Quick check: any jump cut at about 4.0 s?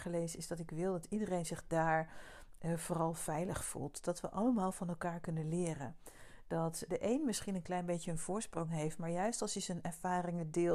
no; 1 cut; at 6.9 s

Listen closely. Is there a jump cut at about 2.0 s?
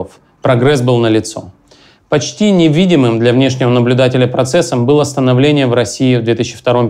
yes; 1 cut; at 2.0 s

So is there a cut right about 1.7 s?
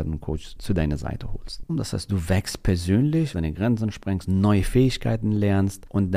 yes; 2 cuts; at 1.7 s, 3.3 s

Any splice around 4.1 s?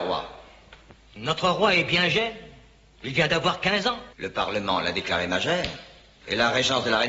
yes; 1 cut; at 4.1 s

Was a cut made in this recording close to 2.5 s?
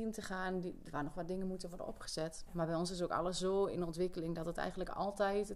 yes; 1 cut; at 2.5 s

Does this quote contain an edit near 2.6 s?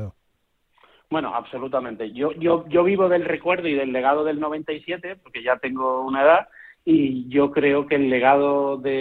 no; 0 cuts

